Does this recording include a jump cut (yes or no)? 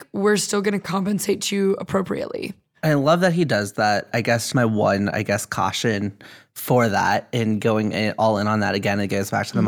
yes